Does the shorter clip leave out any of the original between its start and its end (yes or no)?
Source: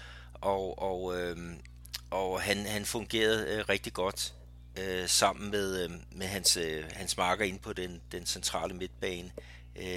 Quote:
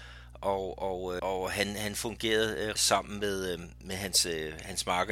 yes